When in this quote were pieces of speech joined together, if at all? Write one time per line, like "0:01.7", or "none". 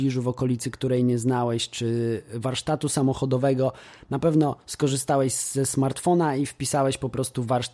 none